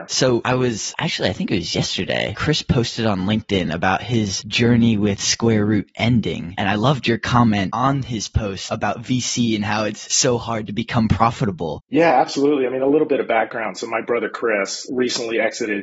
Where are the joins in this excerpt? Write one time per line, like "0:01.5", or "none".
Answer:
0:11.8